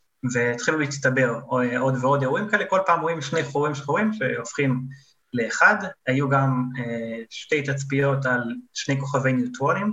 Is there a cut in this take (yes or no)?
no